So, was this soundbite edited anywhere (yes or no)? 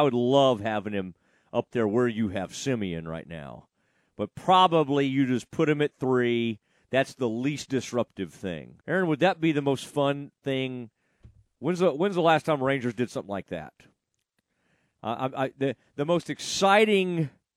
yes